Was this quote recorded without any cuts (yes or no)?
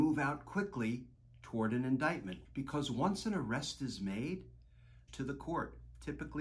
no